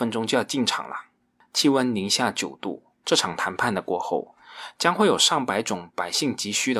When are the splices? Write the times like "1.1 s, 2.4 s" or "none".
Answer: 3.0 s